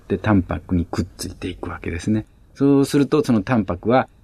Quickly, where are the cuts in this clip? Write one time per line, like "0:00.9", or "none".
none